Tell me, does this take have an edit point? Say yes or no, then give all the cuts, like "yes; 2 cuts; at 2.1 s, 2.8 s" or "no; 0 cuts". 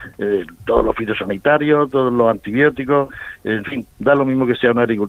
yes; 1 cut; at 3.9 s